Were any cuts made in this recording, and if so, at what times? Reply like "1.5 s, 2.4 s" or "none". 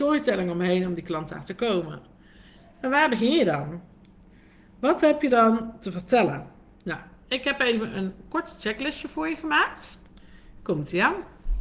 none